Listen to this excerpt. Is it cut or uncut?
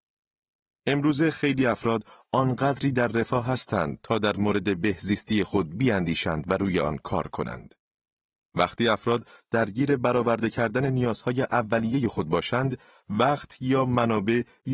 uncut